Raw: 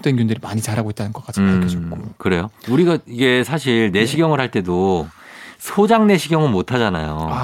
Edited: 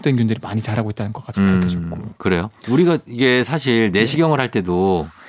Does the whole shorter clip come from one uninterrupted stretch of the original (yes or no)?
yes